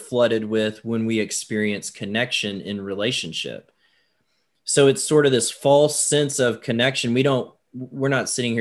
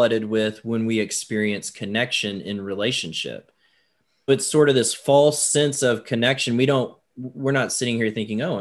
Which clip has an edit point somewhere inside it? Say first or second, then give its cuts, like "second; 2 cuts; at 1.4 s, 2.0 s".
second; 1 cut; at 4.3 s